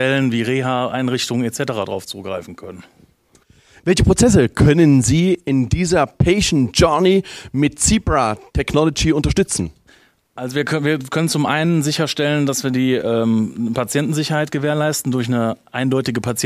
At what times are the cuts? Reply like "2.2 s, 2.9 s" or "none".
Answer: none